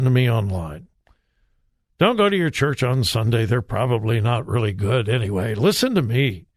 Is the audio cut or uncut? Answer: uncut